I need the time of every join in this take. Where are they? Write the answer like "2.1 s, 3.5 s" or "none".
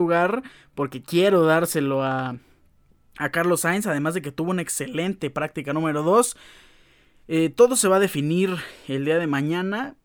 none